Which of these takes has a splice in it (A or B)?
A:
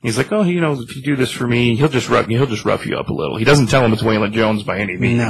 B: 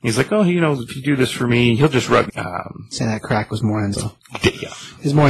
B